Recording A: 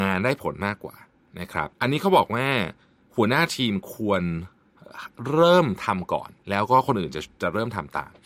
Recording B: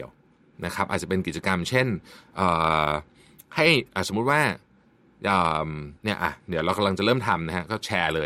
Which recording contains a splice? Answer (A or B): A